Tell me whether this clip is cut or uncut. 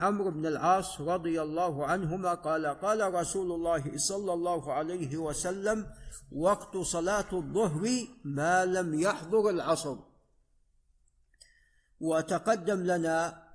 uncut